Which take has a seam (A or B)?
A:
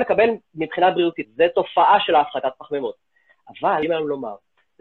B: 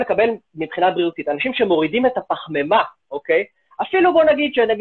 A